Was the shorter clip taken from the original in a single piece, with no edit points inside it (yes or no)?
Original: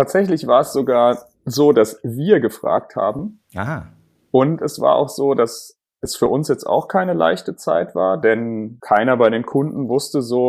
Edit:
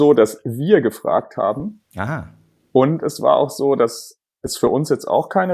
yes